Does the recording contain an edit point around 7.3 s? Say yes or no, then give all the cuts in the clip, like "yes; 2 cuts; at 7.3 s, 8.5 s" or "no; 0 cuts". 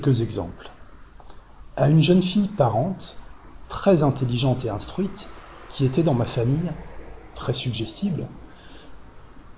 no; 0 cuts